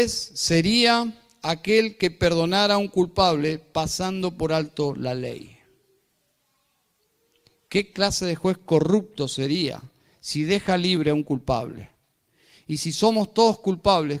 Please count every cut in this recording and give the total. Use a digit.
0